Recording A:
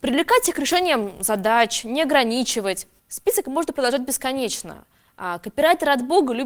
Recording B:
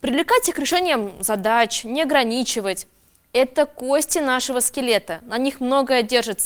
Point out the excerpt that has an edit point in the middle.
A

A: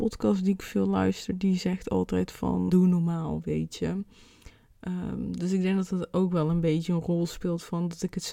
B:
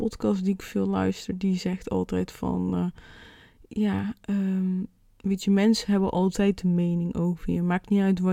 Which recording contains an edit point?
A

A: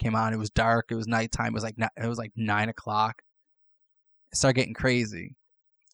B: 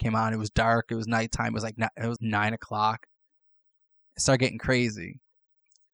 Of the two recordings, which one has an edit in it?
B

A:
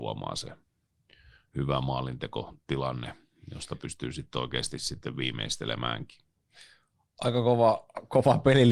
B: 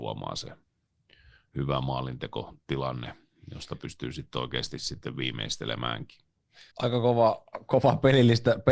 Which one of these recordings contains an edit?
B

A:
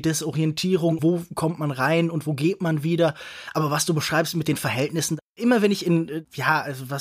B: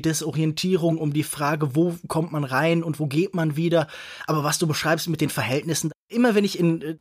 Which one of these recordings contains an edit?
A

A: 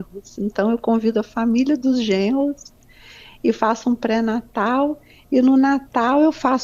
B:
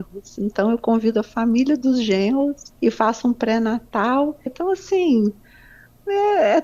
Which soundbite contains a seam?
B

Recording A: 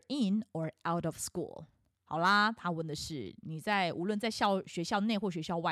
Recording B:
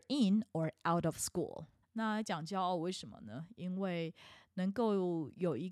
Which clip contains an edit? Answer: B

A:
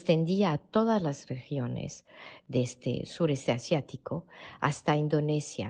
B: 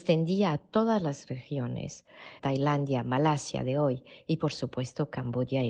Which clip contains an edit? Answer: B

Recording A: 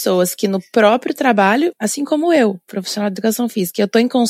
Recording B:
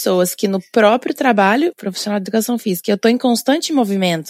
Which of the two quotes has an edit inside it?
B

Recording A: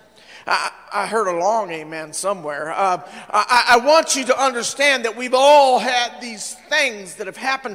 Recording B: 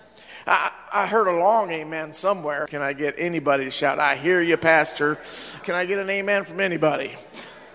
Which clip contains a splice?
B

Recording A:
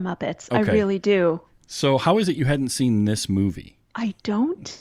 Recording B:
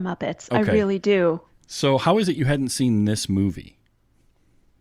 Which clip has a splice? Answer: A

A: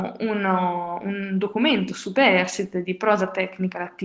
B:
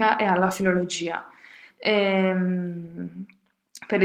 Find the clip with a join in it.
B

